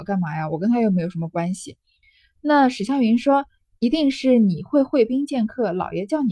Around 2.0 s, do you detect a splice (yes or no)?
no